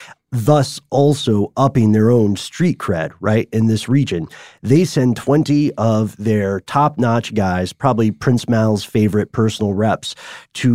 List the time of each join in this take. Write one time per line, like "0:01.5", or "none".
none